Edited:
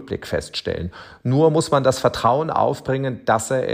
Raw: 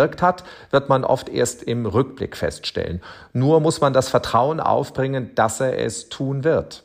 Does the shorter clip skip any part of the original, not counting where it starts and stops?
no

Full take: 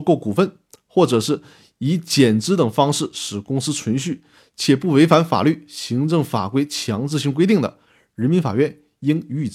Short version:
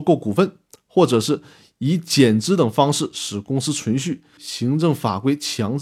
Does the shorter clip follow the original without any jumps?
no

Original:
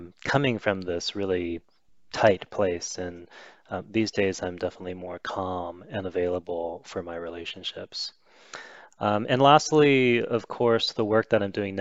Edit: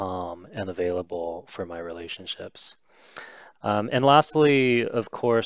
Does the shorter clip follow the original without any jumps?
yes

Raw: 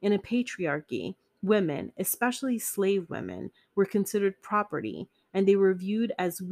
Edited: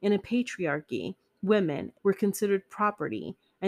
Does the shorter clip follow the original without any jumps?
no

